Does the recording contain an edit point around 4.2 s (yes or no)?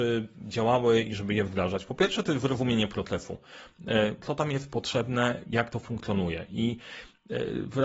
yes